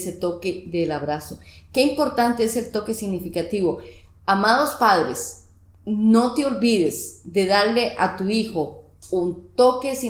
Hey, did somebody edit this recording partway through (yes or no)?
no